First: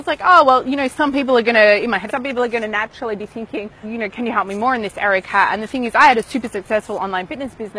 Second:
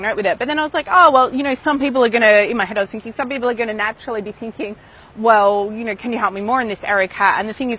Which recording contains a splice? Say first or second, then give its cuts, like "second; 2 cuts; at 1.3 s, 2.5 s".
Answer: first; 2 cuts; at 2.1 s, 3.8 s